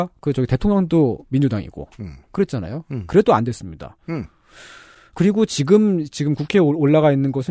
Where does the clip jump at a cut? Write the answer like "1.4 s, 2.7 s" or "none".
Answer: none